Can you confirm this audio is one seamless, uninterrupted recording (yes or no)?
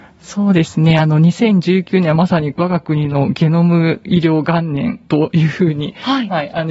yes